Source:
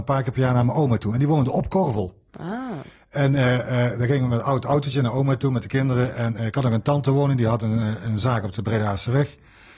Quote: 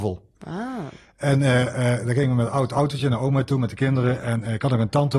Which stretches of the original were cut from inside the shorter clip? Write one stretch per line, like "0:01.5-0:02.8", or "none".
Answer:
none

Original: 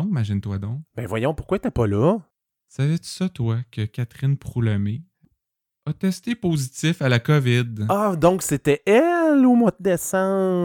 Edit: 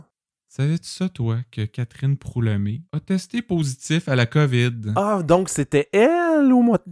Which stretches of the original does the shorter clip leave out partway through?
0:05.1-0:05.8

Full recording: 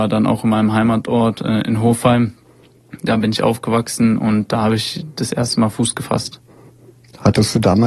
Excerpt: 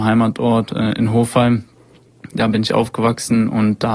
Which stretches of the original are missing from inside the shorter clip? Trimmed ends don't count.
none

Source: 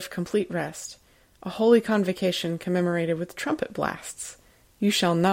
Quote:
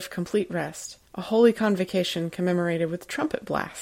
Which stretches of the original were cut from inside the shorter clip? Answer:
0:01.1-0:01.3

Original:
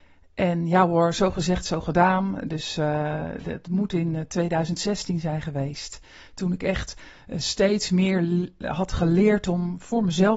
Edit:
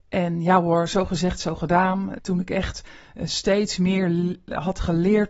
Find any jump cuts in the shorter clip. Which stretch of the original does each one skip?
0:02.4-0:06.3

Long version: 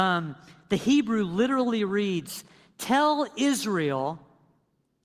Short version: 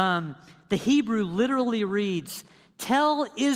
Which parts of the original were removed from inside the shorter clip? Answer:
none

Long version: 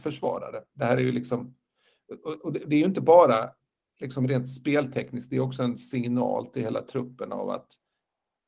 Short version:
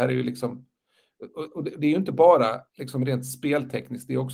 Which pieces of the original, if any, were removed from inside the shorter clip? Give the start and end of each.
0:03.6-0:03.9

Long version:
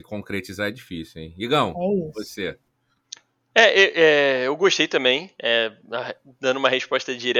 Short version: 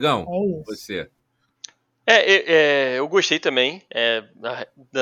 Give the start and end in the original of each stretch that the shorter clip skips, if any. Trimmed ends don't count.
none

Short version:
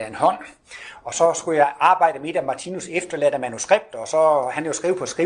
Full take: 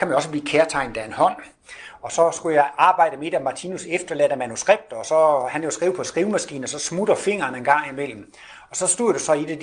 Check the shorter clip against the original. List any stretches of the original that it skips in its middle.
none

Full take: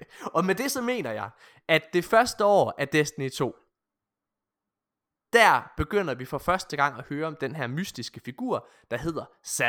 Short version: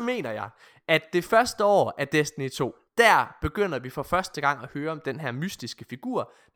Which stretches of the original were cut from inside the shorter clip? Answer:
0:03.7-0:05.2

